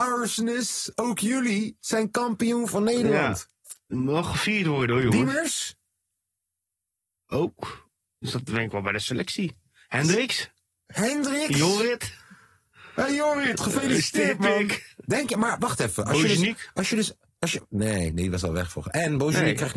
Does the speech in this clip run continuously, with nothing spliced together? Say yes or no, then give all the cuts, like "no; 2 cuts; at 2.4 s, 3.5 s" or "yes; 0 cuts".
yes; 0 cuts